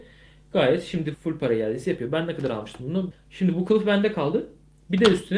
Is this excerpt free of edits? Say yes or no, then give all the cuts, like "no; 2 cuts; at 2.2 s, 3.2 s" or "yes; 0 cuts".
no; 2 cuts; at 1.1 s, 3.1 s